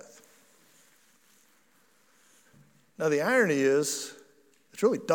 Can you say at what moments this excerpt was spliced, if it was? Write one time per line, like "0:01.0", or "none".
none